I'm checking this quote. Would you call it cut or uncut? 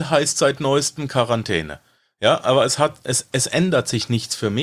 uncut